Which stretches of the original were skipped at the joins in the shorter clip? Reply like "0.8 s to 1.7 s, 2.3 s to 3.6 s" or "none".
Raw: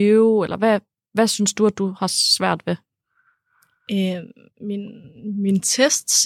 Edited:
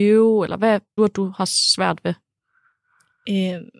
1.0 s to 1.6 s